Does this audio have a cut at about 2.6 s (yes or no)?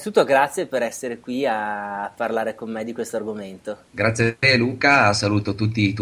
no